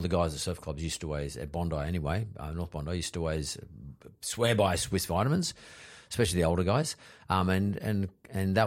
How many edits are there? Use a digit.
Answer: 0